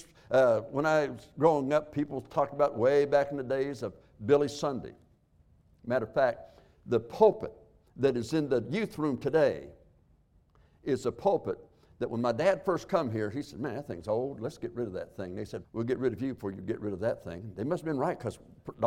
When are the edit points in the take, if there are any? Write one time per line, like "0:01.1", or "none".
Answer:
0:15.6